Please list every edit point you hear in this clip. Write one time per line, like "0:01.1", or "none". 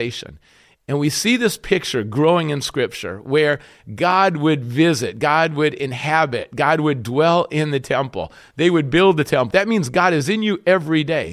0:09.5